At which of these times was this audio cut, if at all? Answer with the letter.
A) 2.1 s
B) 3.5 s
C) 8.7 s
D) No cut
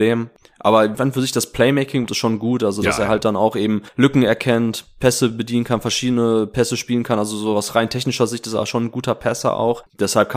A